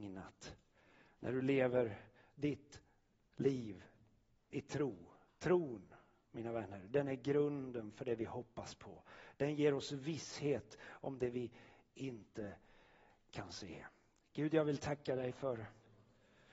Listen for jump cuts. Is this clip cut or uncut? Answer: uncut